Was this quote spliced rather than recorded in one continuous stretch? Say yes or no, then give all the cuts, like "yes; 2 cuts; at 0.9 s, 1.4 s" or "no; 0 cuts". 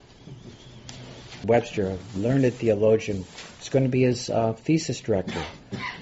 yes; 1 cut; at 1.4 s